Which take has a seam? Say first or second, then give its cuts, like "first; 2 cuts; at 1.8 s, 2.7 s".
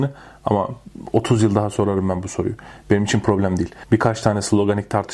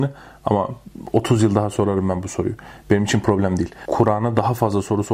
first; 1 cut; at 3.8 s